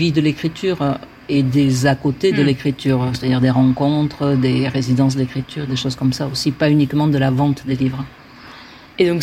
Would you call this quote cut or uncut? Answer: uncut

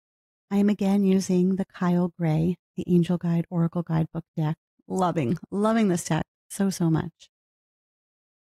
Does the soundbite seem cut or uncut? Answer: uncut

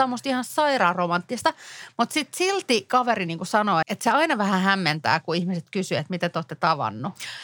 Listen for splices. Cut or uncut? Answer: cut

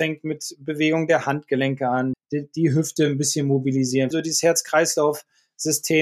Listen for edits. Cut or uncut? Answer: cut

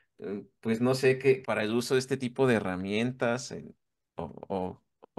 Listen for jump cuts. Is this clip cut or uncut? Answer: cut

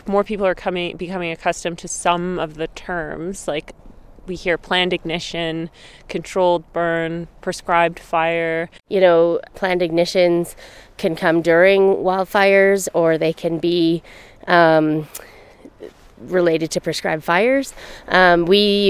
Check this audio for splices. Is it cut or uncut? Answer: cut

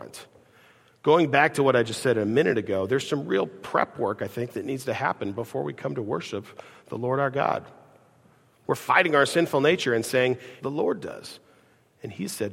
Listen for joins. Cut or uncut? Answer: cut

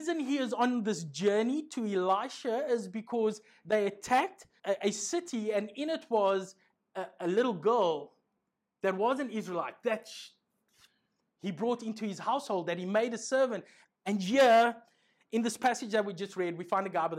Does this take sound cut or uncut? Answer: cut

